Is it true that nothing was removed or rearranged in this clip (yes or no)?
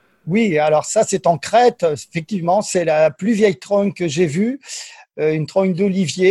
yes